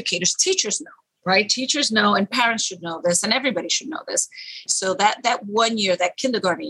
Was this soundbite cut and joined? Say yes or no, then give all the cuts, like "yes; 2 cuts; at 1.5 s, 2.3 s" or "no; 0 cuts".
yes; 1 cut; at 4.7 s